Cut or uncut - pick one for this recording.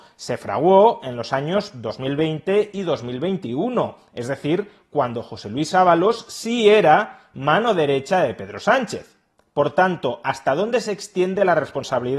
uncut